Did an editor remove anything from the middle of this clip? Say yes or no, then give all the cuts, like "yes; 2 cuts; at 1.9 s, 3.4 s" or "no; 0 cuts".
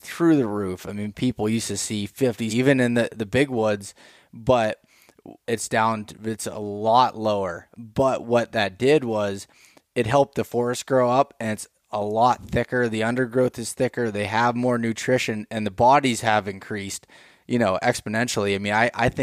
yes; 2 cuts; at 2.5 s, 5.4 s